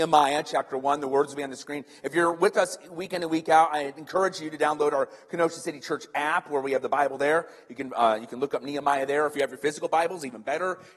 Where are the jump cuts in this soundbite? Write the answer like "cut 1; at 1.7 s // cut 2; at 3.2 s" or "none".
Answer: none